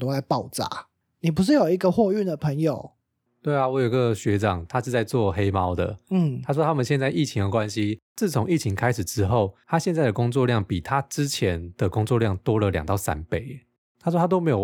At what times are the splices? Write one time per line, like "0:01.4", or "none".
none